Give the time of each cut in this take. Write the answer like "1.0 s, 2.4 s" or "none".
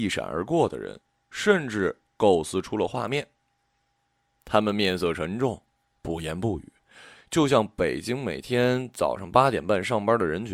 none